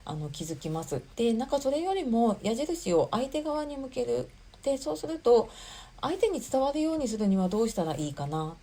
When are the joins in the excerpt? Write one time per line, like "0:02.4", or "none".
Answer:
0:01.1